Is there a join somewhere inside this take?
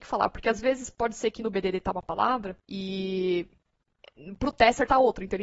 yes; 1 cut; at 2.6 s

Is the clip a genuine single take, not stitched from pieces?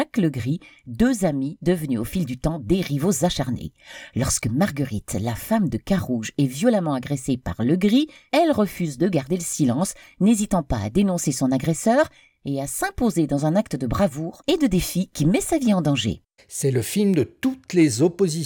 no; 2 cuts; at 8.3 s, 16.4 s

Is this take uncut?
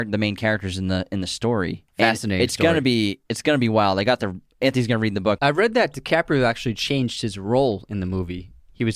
no; 2 cuts; at 1.9 s, 5.4 s

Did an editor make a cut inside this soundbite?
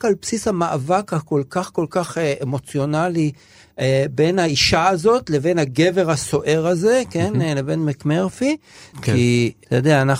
yes; 1 cut; at 8.9 s

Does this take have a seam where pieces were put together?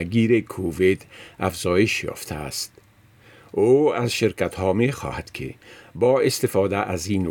no; 0 cuts

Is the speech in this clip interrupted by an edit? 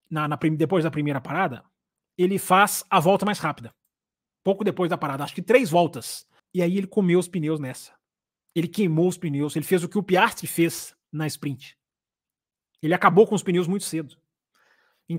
yes; 1 cut; at 6.4 s

